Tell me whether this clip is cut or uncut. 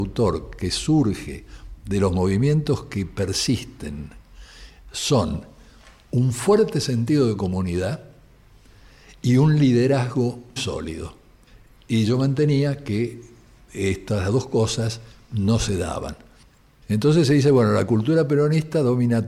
cut